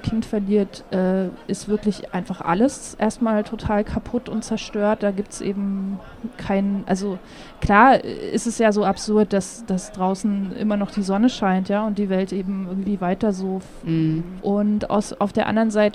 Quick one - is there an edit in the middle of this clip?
yes; 1 cut; at 14.4 s

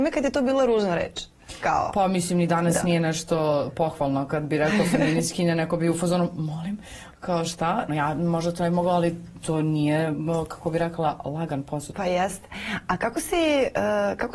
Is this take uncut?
no; 2 cuts; at 7.9 s, 11.9 s

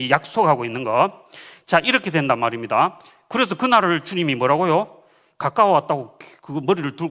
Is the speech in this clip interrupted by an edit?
no; 0 cuts

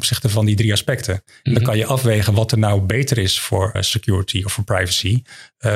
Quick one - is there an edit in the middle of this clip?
yes; 1 cut; at 3.7 s

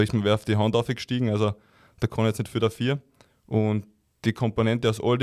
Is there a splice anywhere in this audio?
no; 0 cuts

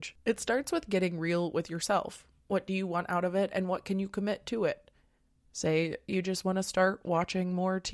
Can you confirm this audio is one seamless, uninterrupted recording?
no; 1 cut; at 5.4 s

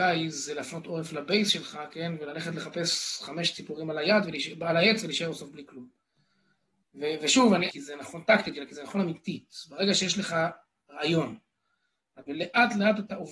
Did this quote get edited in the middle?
yes; 2 cuts; at 7.7 s, 12.3 s

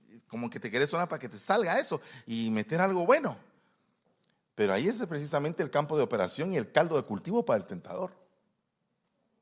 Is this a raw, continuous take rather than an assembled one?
yes; 0 cuts

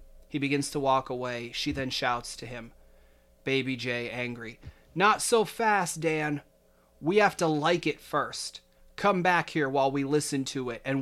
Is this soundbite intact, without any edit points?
yes; 0 cuts

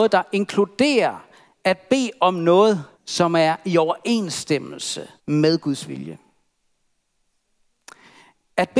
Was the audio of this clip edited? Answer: yes; 2 cuts; at 2.9 s, 5.2 s

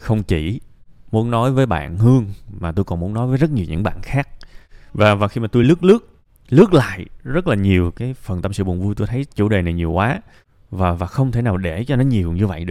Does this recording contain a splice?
no; 0 cuts

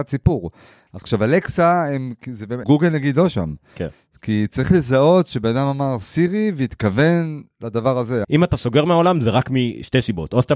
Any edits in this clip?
yes; 2 cuts; at 2.6 s, 8.2 s

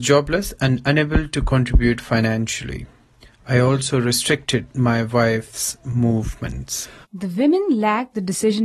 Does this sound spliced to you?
yes; 1 cut; at 7.0 s

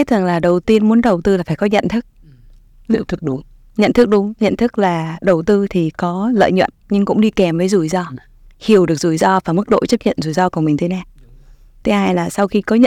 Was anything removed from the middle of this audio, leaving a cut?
no; 0 cuts

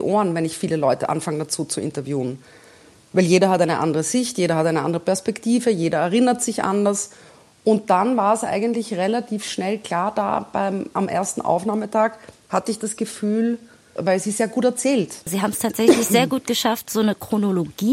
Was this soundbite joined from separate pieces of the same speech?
yes; 1 cut; at 14.0 s

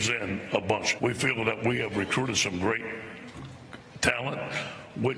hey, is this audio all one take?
no; 1 cut; at 1.0 s

